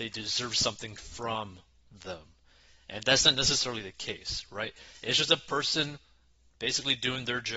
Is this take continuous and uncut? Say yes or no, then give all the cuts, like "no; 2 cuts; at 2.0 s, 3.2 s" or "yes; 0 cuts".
yes; 0 cuts